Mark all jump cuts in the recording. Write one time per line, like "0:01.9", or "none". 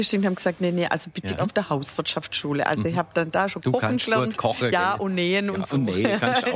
0:01.4